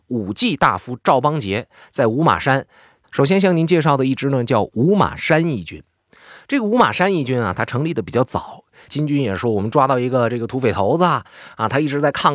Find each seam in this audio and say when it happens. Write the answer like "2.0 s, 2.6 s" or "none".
3.0 s, 8.9 s